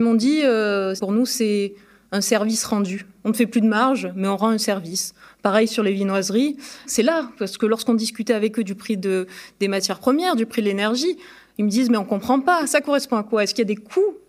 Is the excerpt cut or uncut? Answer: cut